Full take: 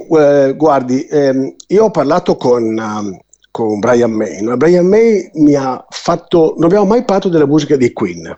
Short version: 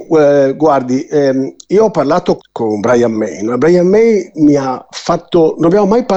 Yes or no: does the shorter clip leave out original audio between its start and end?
yes